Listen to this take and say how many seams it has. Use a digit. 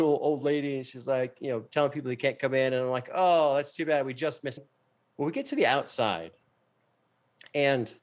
1